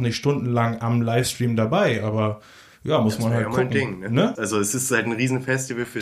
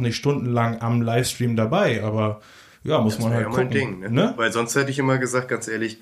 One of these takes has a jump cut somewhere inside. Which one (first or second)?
first